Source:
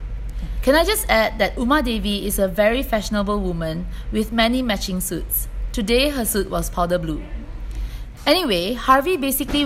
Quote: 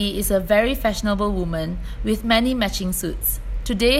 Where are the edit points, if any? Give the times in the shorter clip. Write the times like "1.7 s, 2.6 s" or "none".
none